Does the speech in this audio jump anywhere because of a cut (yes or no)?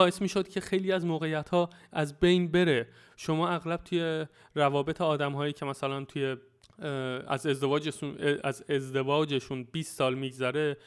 no